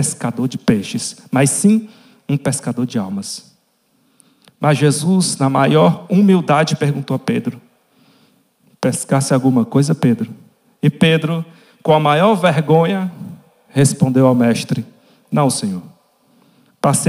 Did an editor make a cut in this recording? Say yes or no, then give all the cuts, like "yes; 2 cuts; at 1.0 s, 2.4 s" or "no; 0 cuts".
no; 0 cuts